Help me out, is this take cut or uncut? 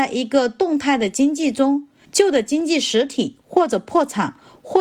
cut